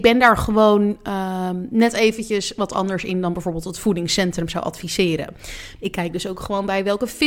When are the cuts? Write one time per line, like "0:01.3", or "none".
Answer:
0:05.8